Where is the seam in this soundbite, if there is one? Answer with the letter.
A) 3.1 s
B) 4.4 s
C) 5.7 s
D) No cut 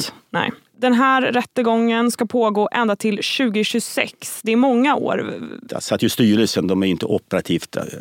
C